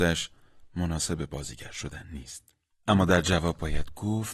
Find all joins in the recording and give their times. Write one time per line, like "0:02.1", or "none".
0:02.8